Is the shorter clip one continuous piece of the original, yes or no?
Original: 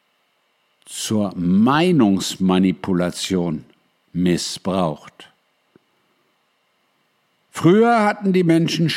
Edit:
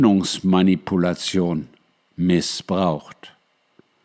yes